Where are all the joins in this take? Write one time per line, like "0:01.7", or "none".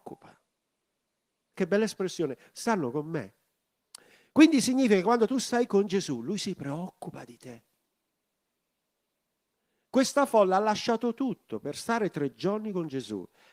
0:01.5